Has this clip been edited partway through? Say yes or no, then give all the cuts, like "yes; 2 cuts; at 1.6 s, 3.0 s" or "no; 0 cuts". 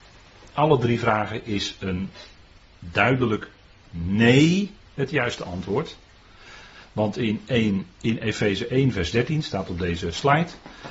no; 0 cuts